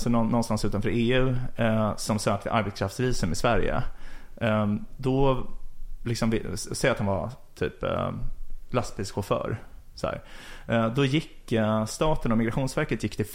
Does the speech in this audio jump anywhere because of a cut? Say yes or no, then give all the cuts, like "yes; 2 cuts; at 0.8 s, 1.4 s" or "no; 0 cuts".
no; 0 cuts